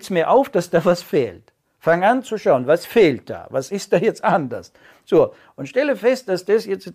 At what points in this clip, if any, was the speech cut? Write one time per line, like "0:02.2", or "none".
none